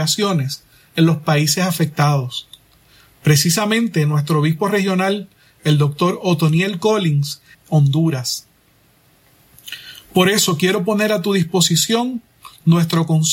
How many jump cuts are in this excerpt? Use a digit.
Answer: 1